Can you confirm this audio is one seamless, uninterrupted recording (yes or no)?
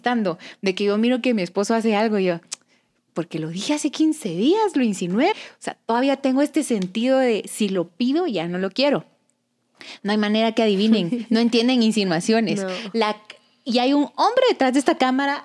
no